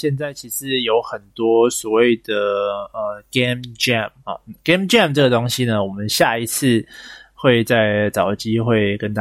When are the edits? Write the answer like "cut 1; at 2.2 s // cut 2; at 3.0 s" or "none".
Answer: cut 1; at 4.2 s